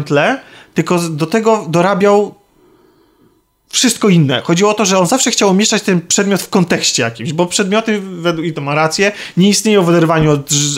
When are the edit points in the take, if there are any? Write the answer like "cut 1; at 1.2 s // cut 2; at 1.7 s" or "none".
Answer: none